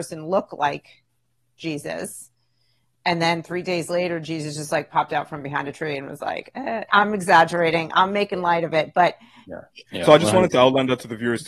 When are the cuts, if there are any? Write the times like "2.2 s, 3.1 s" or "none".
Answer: 6.9 s, 9.9 s